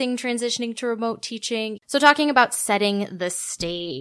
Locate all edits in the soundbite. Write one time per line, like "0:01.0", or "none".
0:01.8